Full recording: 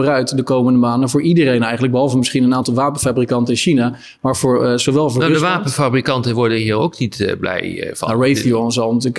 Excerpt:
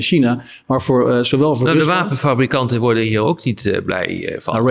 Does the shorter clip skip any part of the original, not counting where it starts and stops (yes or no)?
no